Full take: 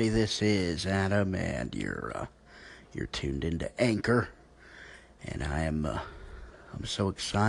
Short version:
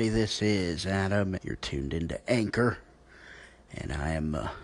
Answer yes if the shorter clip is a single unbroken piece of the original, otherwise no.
no